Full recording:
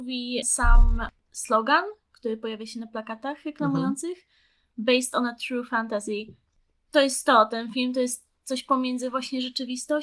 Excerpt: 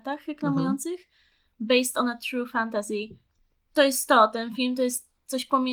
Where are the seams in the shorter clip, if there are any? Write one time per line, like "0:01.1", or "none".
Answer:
none